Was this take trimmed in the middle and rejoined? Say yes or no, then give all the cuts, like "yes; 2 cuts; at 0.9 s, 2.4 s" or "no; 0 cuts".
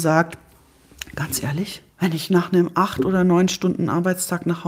yes; 1 cut; at 1.9 s